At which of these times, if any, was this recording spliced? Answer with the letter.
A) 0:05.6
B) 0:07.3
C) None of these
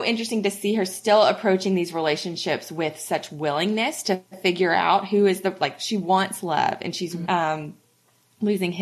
B